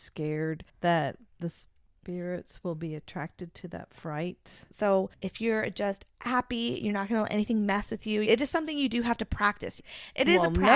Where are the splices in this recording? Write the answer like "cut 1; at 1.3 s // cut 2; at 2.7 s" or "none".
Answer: cut 1; at 4.7 s // cut 2; at 8.2 s // cut 3; at 9.8 s